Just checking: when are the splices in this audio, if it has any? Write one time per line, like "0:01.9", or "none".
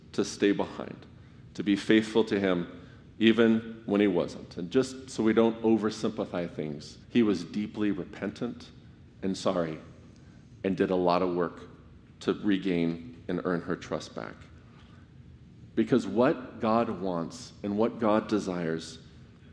0:01.5
0:07.0
0:15.7